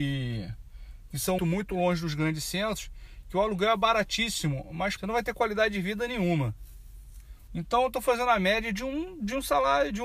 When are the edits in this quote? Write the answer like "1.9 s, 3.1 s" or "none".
1.4 s, 5.0 s, 7.5 s